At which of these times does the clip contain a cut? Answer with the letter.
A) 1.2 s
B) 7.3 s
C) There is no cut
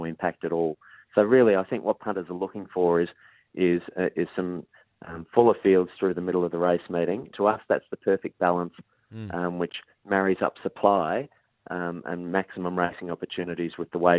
B